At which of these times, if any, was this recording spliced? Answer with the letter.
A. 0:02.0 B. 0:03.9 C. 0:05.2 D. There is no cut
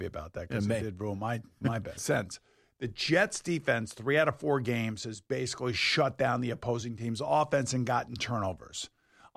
A